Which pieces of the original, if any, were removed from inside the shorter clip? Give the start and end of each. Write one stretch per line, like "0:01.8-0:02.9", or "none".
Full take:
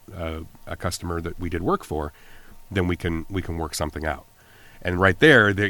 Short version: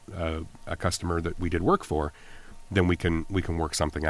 none